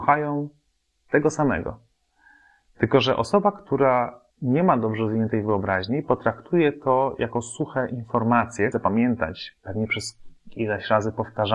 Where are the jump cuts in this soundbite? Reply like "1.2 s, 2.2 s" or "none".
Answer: 4.3 s, 8.7 s